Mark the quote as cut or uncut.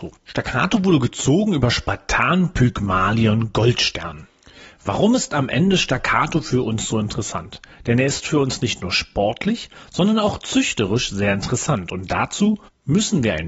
uncut